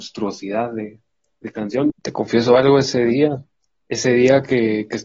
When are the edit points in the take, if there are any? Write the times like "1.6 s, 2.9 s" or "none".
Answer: 1.9 s